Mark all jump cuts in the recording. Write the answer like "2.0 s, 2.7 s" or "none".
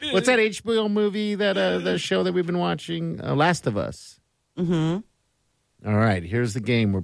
none